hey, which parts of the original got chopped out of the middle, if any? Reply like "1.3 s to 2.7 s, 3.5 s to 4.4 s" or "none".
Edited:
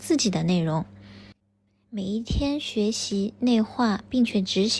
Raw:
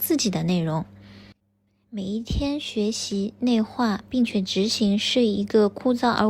none